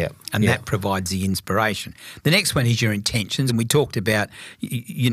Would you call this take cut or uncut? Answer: uncut